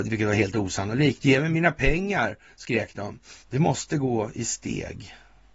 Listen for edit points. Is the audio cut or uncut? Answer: cut